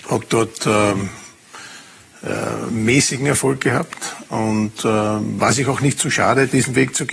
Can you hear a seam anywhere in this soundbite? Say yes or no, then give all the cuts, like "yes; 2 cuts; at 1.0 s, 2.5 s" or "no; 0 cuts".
no; 0 cuts